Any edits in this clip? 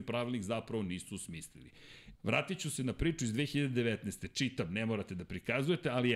yes; 1 cut; at 2.2 s

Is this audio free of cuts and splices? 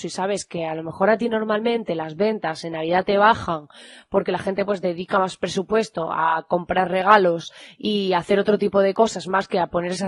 yes; 0 cuts

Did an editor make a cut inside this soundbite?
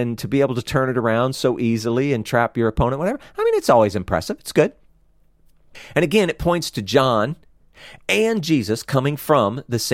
no; 0 cuts

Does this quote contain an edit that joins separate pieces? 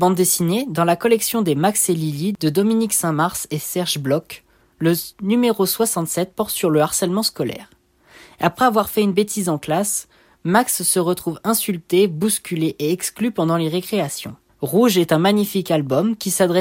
yes; 1 cut; at 14.5 s

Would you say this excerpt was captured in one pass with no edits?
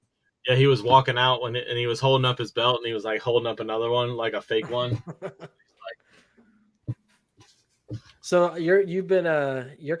yes; 0 cuts

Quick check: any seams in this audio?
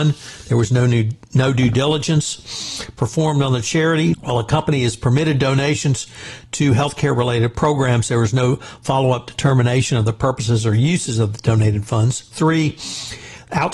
yes; 1 cut; at 4.1 s

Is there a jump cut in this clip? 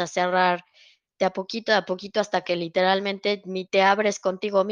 no; 0 cuts

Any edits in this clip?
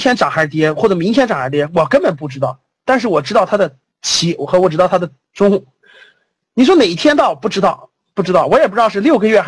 no; 0 cuts

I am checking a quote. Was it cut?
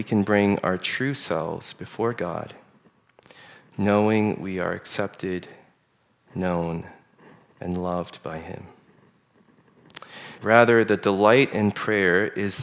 yes; 1 cut; at 10.4 s

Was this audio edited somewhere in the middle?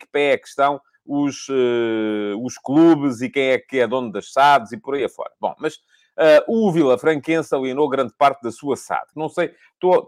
yes; 1 cut; at 9.1 s

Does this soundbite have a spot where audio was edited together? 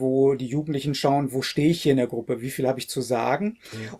no; 0 cuts

